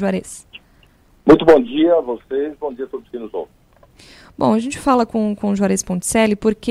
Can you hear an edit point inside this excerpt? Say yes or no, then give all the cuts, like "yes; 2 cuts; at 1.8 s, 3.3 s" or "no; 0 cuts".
no; 0 cuts